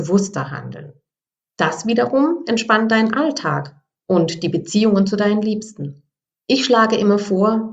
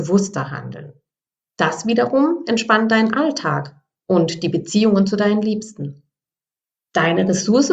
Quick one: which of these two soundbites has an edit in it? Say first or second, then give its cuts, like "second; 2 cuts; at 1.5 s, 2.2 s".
first; 1 cut; at 6.4 s